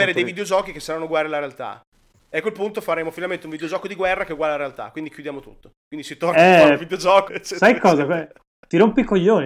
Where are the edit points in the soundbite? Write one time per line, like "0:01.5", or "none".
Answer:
0:07.3